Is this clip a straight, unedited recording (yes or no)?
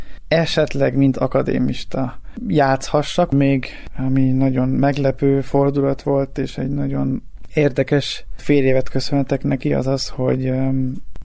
no